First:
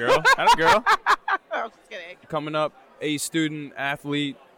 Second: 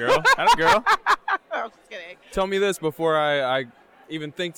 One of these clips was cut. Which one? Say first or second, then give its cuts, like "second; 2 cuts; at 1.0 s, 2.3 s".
first; 1 cut; at 2.2 s